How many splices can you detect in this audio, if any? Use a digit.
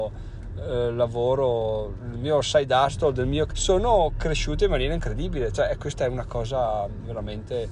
1